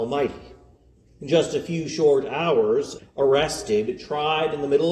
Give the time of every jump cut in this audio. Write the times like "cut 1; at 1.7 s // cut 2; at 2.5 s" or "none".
cut 1; at 1.1 s // cut 2; at 3.0 s